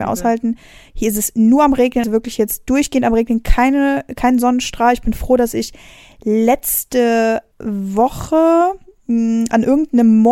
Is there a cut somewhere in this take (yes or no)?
yes